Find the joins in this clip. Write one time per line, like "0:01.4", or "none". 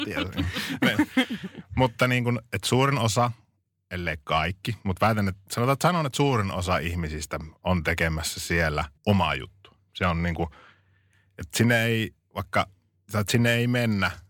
0:09.0